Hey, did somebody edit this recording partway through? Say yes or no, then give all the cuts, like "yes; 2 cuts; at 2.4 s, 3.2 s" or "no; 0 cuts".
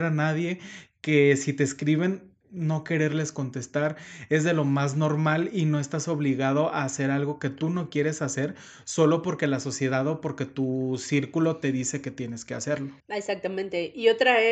yes; 1 cut; at 13.0 s